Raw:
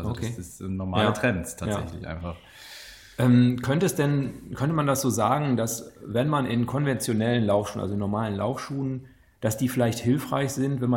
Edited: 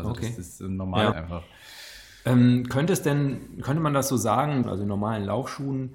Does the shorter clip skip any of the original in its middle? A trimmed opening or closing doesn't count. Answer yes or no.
yes